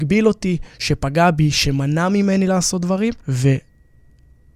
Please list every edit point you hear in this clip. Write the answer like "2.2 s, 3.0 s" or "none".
3.2 s